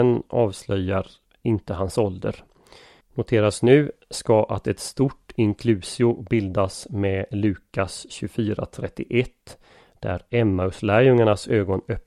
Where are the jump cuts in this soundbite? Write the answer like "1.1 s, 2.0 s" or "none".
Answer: 3.0 s